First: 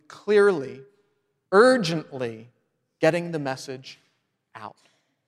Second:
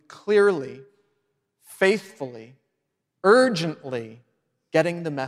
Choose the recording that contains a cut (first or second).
first